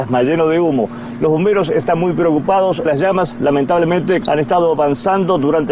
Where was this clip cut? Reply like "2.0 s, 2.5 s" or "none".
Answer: 2.9 s, 4.2 s